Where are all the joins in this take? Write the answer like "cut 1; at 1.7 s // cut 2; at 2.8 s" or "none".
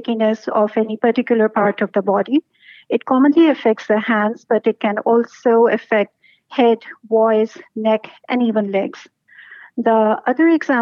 none